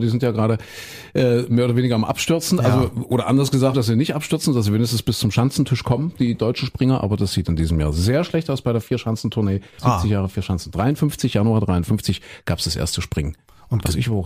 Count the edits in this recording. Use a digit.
2